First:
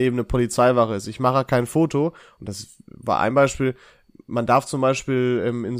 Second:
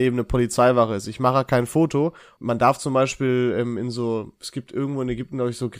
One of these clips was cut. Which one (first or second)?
second